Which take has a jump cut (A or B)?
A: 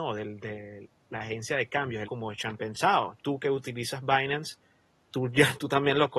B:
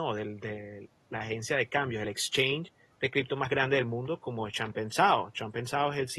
A